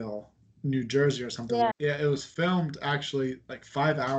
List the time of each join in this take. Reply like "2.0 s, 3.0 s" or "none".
1.7 s